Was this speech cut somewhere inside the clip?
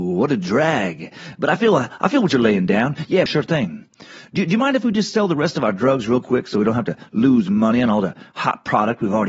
yes; 1 cut; at 3.3 s

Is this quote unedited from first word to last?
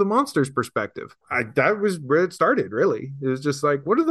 no; 1 cut; at 1.2 s

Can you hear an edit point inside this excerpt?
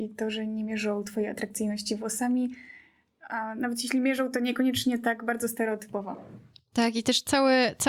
no; 0 cuts

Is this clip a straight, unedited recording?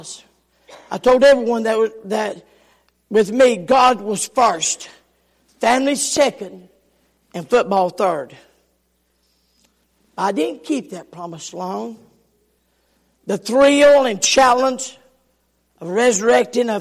yes; 0 cuts

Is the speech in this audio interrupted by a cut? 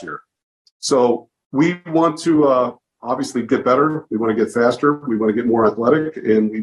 no; 0 cuts

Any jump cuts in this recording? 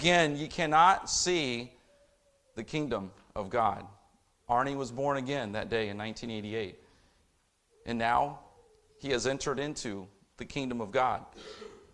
no; 0 cuts

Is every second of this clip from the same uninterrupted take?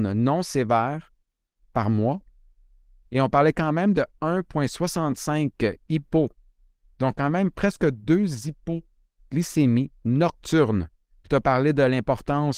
yes; 0 cuts

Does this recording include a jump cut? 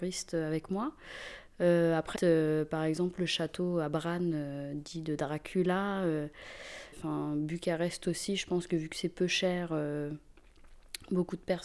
yes; 2 cuts; at 2.1 s, 6.9 s

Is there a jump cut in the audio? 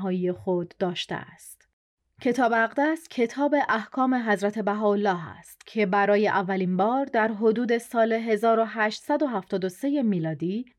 yes; 1 cut; at 2.1 s

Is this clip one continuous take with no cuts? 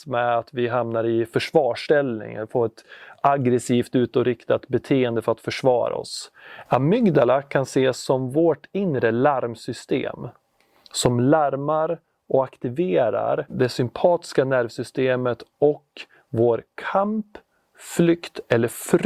no; 1 cut; at 6.7 s

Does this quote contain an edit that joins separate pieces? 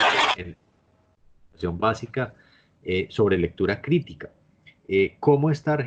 no; 0 cuts

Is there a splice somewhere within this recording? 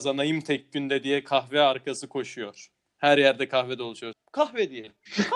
yes; 1 cut; at 4.1 s

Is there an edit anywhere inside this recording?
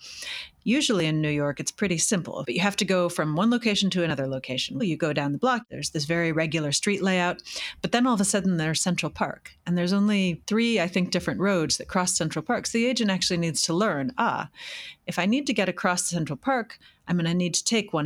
yes; 2 cuts; at 2.4 s, 4.8 s

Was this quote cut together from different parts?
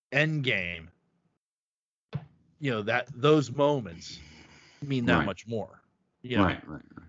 no; 0 cuts

